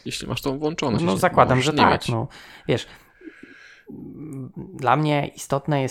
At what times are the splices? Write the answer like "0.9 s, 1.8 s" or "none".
1.0 s